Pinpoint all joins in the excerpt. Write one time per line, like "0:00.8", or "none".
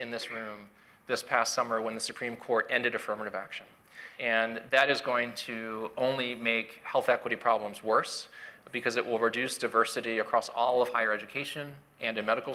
none